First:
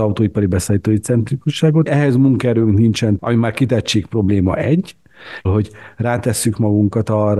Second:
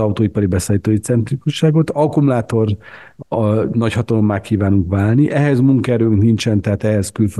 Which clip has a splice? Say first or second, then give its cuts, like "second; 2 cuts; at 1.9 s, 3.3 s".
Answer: first; 3 cuts; at 1.9 s, 3.2 s, 5.5 s